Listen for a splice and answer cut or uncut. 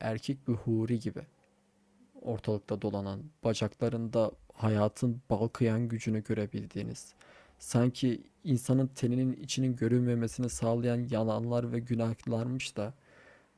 uncut